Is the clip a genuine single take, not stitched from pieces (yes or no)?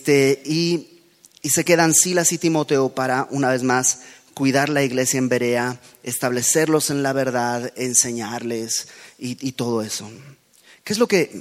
yes